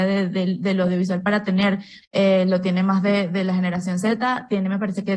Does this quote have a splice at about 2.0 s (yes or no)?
yes